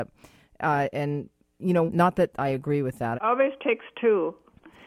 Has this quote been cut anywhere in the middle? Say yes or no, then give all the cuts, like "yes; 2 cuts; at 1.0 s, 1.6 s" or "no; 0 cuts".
yes; 2 cuts; at 1.9 s, 3.1 s